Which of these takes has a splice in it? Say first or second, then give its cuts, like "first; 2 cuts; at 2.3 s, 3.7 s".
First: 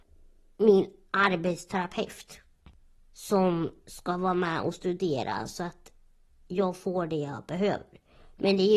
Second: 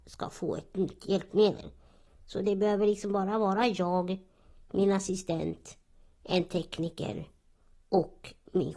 second; 1 cut; at 2.1 s